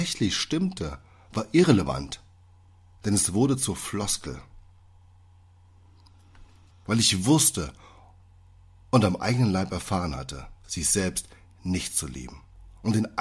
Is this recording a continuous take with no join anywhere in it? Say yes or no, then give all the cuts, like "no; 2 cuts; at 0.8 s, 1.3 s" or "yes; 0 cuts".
no; 2 cuts; at 6.7 s, 10.6 s